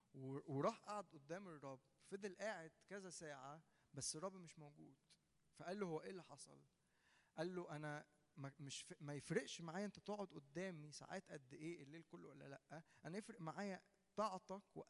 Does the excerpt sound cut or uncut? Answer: uncut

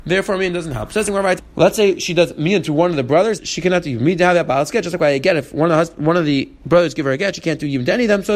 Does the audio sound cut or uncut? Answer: cut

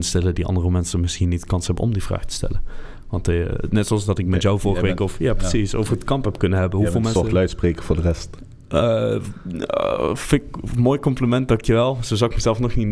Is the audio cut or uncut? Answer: uncut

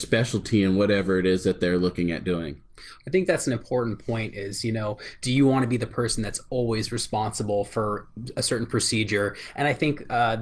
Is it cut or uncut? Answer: uncut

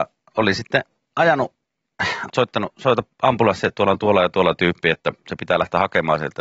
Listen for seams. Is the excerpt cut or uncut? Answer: cut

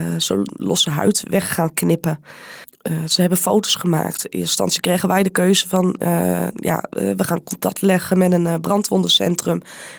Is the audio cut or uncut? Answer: uncut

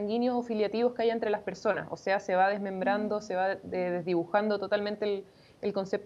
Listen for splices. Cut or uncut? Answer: uncut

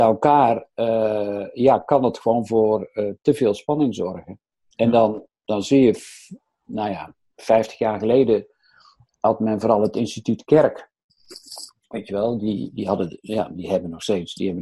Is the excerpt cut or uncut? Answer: uncut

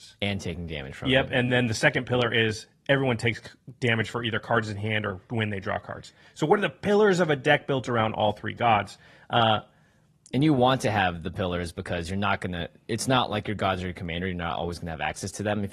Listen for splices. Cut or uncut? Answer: uncut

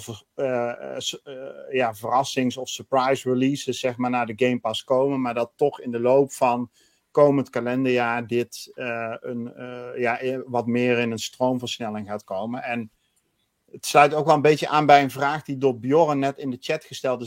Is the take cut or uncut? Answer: uncut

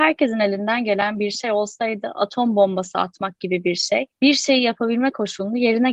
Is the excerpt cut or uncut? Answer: cut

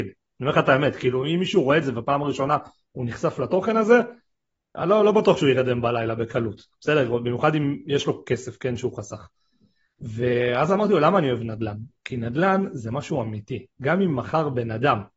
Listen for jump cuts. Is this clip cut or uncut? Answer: uncut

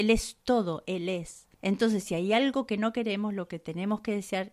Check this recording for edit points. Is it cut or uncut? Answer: cut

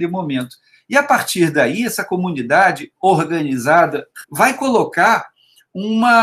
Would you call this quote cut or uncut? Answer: cut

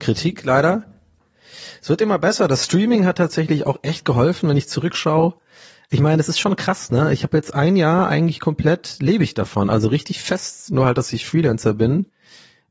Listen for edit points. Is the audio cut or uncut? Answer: cut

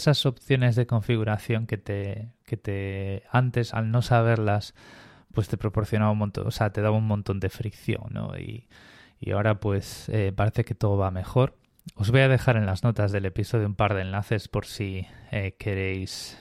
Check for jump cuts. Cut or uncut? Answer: uncut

